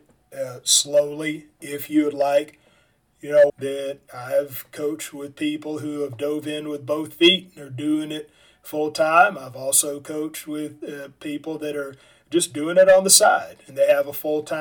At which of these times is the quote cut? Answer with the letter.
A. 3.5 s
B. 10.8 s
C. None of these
A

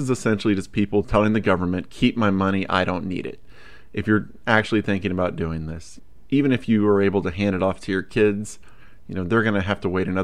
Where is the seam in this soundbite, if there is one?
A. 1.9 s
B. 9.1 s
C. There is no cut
C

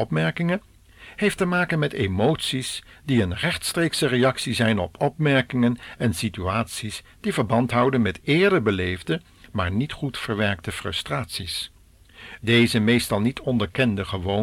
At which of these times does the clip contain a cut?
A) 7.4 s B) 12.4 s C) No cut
B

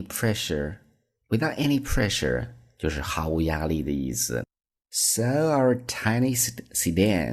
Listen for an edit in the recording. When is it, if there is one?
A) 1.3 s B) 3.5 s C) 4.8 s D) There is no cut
C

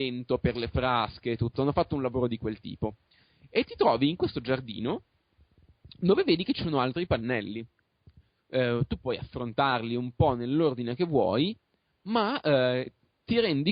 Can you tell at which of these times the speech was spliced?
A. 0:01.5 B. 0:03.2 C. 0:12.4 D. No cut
D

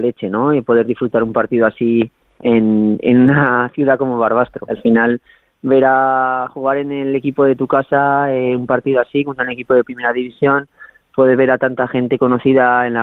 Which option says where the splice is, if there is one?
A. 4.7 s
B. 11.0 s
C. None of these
A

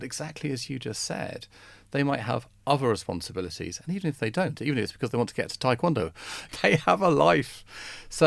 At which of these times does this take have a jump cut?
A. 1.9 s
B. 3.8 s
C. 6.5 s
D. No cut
C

